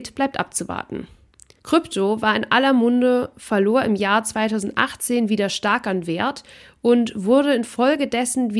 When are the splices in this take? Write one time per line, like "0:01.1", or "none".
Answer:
0:01.6

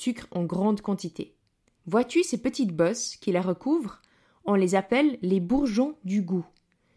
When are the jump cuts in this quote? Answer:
0:01.8

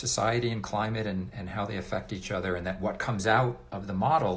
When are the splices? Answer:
none

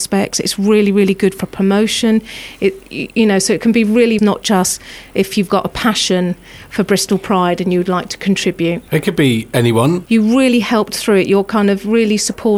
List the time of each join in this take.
0:04.2
0:08.9
0:10.1

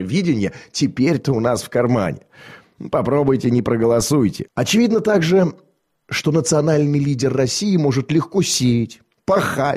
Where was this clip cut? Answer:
0:04.5

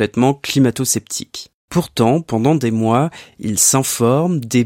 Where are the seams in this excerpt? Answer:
none

